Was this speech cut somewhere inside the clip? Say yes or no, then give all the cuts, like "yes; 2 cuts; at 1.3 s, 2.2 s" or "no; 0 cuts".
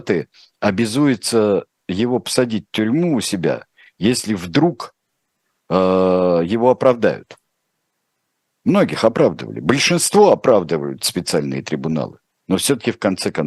yes; 1 cut; at 12.4 s